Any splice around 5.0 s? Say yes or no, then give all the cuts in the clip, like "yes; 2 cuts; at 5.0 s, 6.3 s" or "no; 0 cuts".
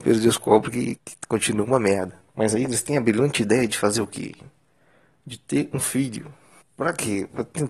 no; 2 cuts; at 1.0 s, 2.3 s